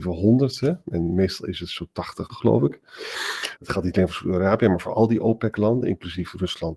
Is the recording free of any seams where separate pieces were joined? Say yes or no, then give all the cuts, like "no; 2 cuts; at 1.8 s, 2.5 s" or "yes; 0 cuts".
no; 2 cuts; at 2.3 s, 3.6 s